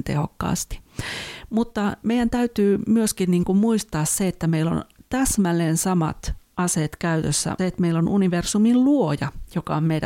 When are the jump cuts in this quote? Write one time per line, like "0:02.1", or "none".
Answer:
0:07.6